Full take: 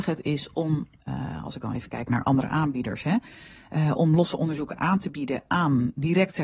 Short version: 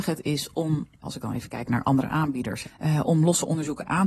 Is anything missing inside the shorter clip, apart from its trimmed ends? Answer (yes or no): yes